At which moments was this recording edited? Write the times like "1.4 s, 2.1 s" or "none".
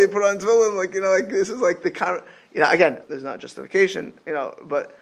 3.0 s